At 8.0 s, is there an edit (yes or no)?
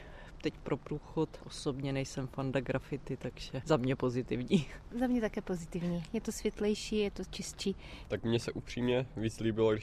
yes